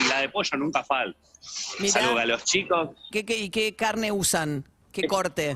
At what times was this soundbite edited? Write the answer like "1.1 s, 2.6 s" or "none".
3.1 s